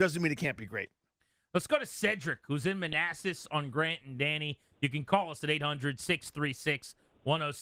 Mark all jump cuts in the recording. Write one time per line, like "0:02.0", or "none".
none

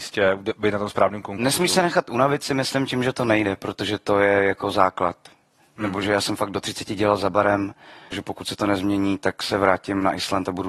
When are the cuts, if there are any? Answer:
0:08.1

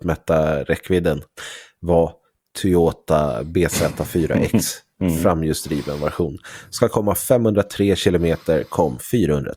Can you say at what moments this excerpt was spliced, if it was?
none

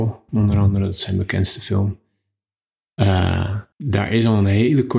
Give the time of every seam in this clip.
0:03.7

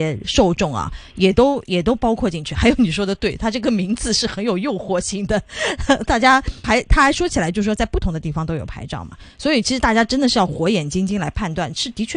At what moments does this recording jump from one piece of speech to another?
0:06.6

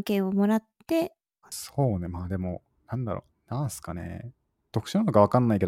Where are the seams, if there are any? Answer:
0:01.4
0:03.3

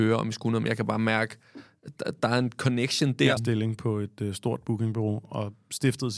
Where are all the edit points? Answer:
0:03.4

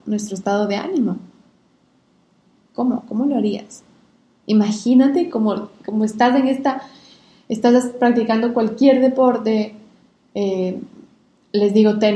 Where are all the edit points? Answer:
0:02.7

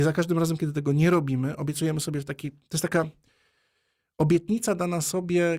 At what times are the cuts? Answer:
none

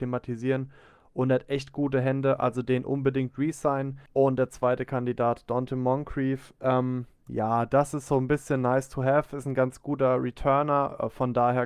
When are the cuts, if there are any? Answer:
none

